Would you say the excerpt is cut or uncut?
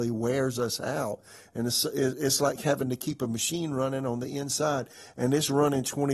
uncut